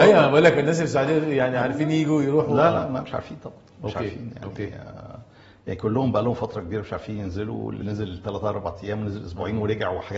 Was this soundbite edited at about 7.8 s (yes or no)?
yes